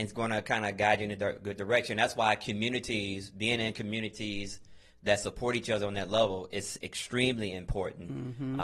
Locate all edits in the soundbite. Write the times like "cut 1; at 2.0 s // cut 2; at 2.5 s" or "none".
none